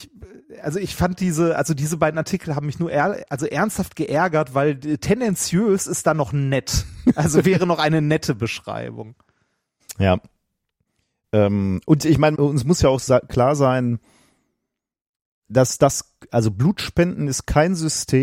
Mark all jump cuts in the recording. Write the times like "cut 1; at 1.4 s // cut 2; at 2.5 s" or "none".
cut 1; at 12.3 s